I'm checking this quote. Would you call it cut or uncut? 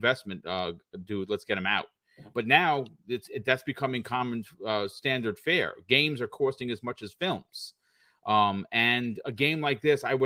uncut